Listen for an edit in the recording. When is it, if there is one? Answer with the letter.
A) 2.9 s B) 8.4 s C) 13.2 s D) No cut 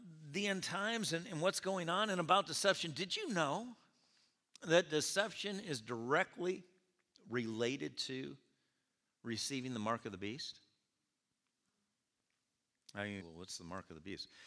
C